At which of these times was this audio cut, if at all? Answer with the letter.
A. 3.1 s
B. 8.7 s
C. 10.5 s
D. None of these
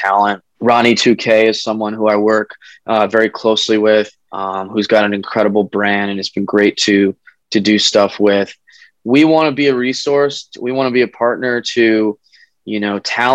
D